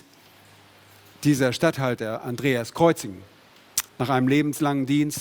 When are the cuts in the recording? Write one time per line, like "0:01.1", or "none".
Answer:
0:03.9